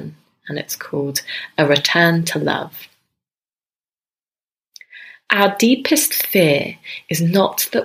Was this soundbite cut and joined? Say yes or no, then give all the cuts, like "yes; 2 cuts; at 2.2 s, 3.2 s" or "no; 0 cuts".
no; 0 cuts